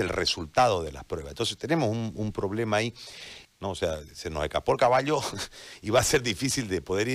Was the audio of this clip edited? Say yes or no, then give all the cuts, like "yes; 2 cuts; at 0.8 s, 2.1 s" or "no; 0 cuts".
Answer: yes; 1 cut; at 3.5 s